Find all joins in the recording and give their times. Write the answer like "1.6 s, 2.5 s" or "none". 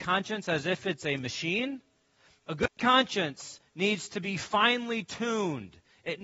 none